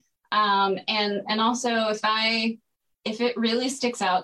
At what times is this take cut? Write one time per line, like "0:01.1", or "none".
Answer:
none